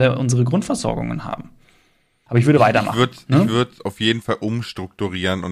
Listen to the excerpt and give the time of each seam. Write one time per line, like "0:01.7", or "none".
0:02.3

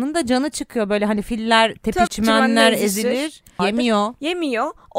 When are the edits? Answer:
0:02.1
0:03.6

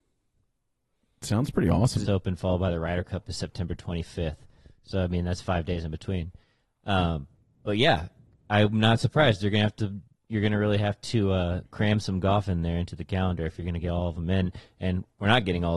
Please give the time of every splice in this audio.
0:02.1

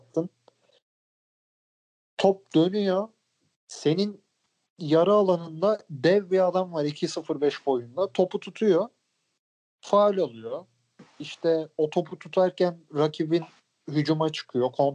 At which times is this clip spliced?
none

